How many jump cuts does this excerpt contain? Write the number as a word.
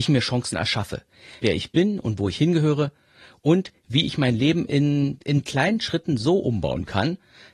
one